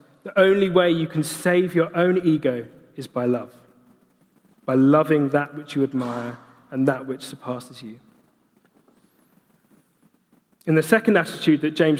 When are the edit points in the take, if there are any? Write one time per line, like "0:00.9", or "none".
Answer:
none